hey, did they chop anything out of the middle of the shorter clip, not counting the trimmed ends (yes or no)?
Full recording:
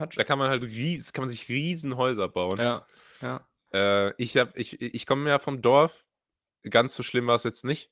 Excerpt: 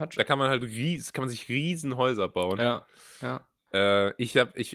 no